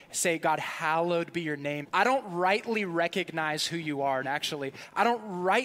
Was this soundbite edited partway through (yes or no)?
yes